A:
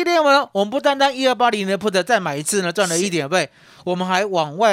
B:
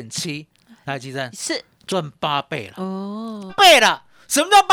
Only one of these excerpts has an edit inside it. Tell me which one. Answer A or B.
B